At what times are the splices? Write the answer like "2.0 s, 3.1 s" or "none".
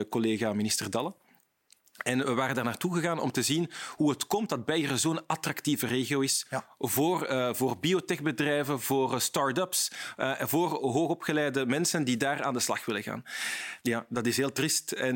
13.8 s